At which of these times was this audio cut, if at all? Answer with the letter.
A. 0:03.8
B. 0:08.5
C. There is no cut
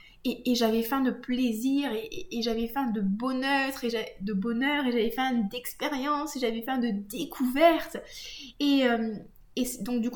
C